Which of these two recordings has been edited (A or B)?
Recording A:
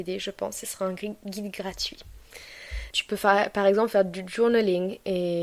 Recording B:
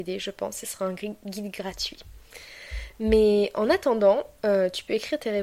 A